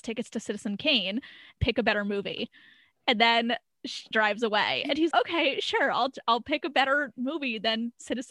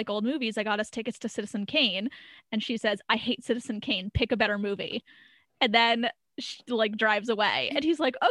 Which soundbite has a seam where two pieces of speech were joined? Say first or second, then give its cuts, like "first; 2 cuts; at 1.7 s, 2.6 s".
first; 3 cuts; at 1.6 s, 4.1 s, 5.1 s